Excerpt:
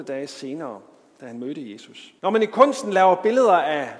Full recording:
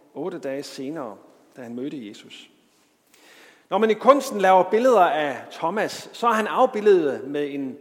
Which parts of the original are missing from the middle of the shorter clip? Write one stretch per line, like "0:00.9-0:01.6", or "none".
0:02.5-0:03.7